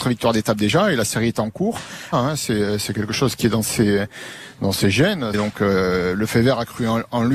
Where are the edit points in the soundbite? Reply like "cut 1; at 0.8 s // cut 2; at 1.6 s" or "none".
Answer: cut 1; at 2.1 s // cut 2; at 5.3 s